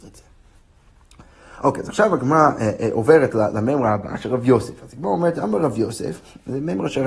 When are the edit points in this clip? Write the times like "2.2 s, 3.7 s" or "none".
none